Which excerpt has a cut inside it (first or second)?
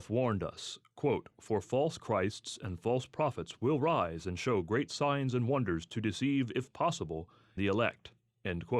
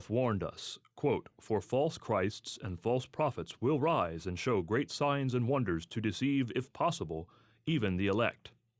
first